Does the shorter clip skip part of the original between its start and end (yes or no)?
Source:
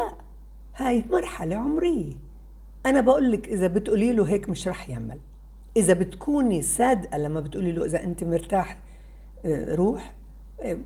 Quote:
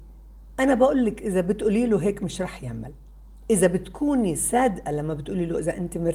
no